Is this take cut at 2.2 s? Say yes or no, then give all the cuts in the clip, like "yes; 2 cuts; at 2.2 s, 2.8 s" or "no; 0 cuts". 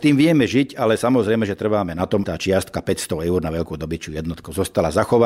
yes; 1 cut; at 2.2 s